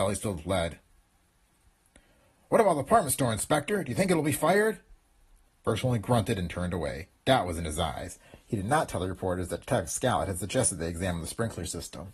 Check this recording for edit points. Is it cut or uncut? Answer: uncut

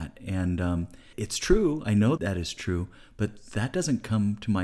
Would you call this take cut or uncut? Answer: cut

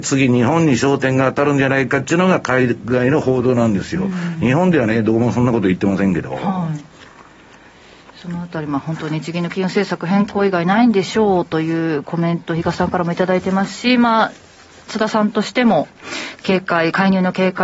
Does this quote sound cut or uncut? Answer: uncut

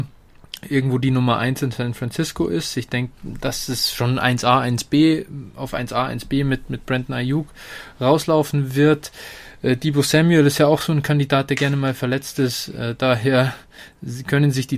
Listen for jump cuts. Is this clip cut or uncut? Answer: uncut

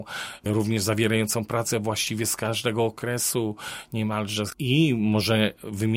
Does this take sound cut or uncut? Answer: uncut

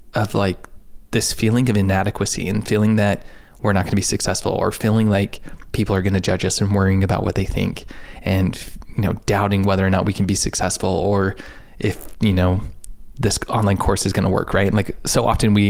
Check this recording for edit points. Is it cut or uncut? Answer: uncut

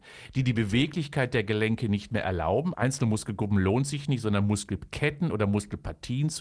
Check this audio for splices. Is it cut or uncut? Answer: cut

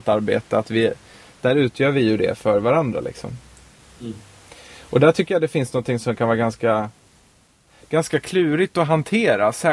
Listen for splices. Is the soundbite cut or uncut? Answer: uncut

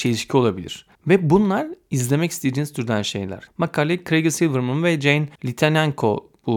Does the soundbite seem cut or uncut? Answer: cut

